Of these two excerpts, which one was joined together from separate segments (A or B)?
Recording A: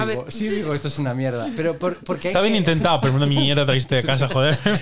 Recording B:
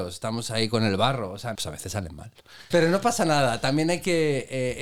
B